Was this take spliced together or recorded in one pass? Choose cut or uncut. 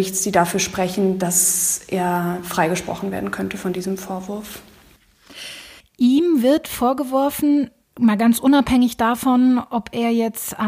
cut